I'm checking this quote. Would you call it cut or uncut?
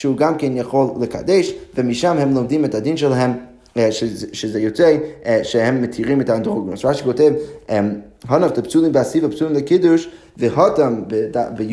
uncut